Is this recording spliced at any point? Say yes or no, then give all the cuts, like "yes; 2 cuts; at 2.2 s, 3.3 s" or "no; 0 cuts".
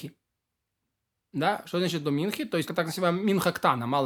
yes; 1 cut; at 2.7 s